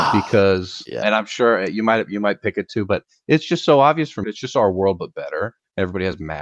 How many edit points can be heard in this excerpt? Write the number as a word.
two